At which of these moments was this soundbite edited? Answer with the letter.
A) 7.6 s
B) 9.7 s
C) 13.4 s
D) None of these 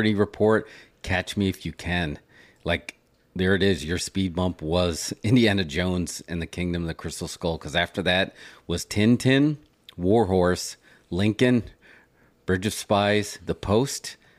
C